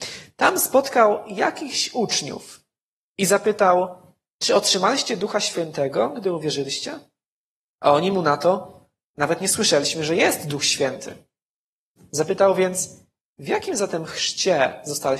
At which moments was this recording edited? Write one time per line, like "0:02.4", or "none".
none